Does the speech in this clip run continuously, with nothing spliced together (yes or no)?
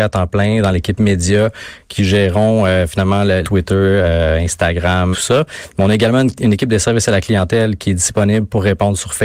no